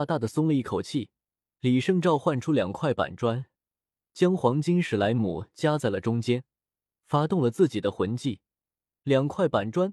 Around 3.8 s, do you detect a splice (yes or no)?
no